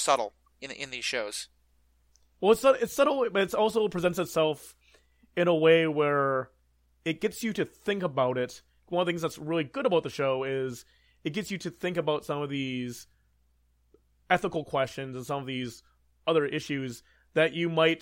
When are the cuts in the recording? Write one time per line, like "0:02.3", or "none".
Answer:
0:08.8